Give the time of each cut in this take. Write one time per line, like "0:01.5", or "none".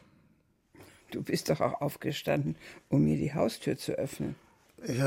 none